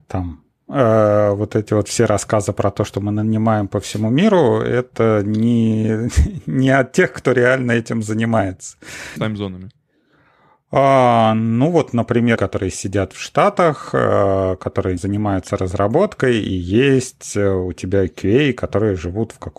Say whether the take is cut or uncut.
cut